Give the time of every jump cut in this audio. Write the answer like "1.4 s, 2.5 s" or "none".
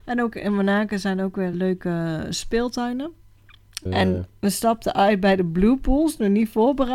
1.5 s, 3.9 s

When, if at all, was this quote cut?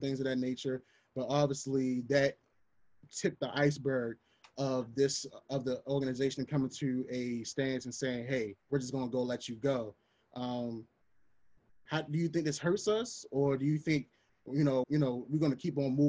8.6 s, 14.8 s

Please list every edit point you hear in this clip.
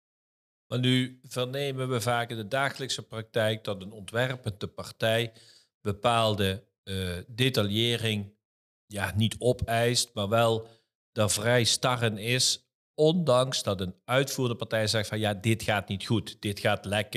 none

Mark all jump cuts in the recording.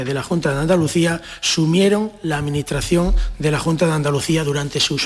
none

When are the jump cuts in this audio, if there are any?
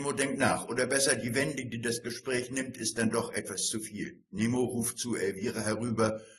none

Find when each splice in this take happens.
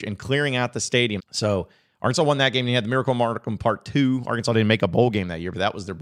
1.2 s

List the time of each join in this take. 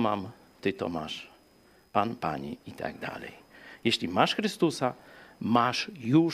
none

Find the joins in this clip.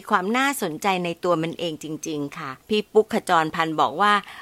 2.6 s

